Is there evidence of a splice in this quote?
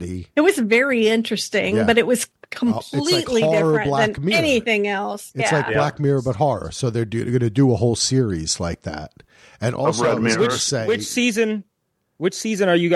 no; 0 cuts

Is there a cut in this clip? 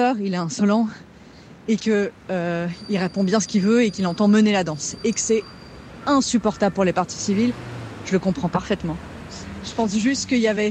no; 0 cuts

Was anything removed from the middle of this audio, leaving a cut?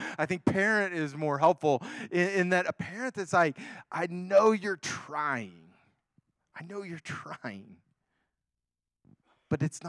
no; 0 cuts

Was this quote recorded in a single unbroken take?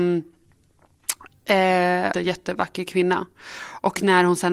no; 1 cut; at 2.1 s

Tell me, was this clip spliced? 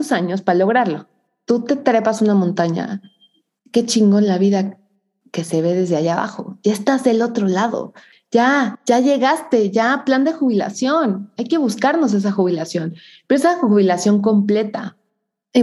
no; 0 cuts

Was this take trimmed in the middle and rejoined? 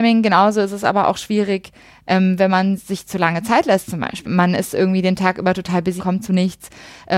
yes; 2 cuts; at 4.2 s, 6.0 s

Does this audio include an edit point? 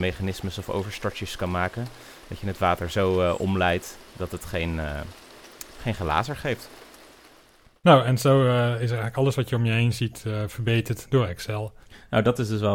no; 0 cuts

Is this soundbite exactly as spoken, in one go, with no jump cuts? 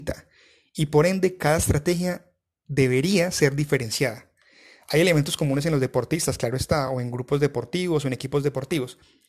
yes; 0 cuts

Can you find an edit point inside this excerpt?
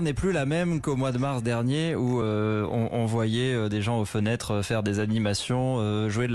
no; 0 cuts

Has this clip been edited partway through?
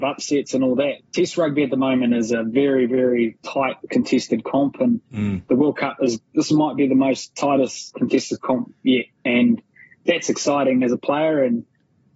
yes; 1 cut; at 1.0 s

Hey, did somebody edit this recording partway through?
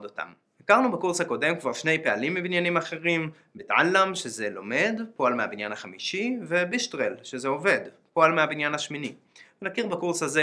no; 0 cuts

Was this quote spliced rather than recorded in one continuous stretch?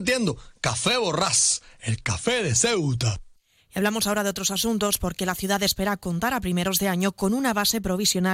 no; 0 cuts

